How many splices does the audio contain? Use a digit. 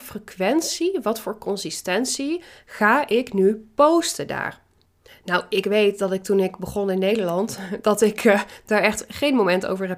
0